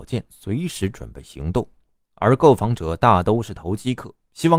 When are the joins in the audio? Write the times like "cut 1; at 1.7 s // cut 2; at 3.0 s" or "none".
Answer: none